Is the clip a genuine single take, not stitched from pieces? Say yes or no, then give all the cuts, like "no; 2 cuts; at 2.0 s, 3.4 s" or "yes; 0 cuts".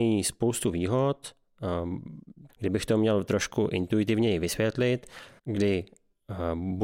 no; 2 cuts; at 2.5 s, 5.4 s